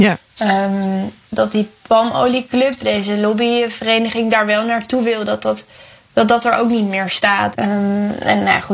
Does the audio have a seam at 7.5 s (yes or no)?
yes